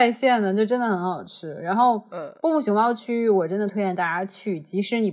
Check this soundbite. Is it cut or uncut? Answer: uncut